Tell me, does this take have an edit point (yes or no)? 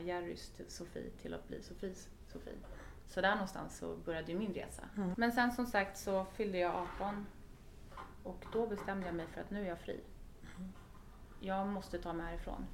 yes